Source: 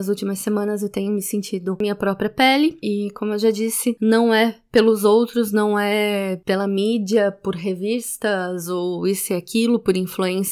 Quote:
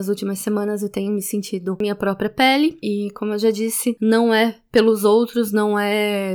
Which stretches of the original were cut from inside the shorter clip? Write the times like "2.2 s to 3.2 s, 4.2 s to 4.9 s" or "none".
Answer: none